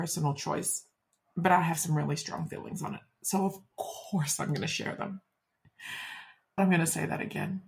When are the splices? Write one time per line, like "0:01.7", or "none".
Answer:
0:06.6